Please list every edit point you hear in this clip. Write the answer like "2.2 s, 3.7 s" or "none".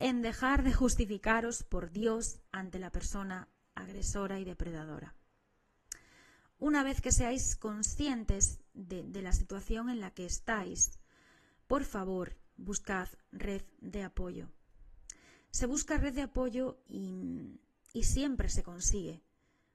2.5 s, 16.9 s